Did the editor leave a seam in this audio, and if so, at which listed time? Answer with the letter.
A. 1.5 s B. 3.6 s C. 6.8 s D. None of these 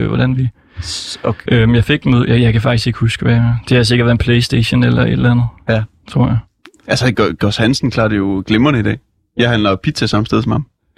A